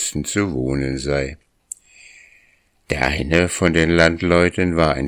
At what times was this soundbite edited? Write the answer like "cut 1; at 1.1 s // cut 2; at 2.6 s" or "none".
none